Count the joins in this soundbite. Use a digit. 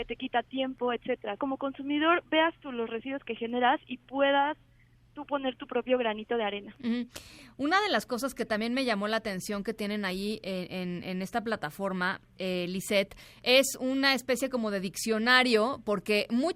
1